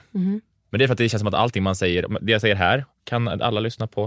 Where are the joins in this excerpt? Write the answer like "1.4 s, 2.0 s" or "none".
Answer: none